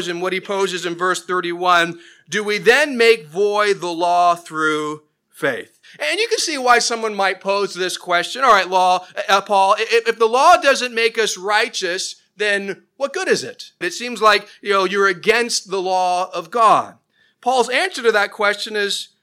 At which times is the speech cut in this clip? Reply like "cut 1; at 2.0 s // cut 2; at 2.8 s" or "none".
cut 1; at 13.8 s